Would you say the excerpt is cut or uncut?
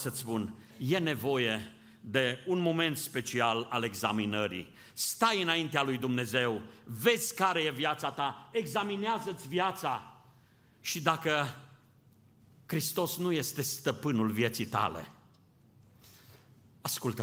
uncut